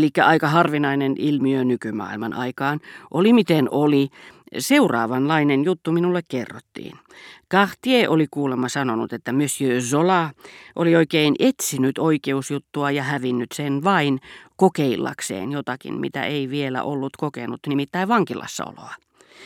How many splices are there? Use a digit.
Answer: 0